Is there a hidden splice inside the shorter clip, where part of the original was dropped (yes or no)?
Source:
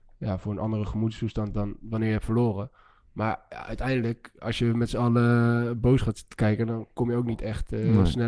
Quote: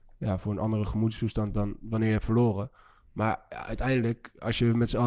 no